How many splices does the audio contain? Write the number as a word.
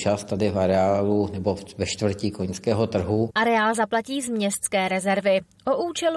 one